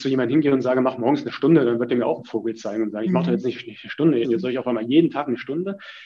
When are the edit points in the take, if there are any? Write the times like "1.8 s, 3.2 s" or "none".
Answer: 4.2 s